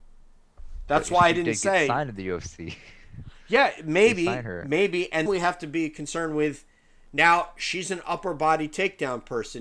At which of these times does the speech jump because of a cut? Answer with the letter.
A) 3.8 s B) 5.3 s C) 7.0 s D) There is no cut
B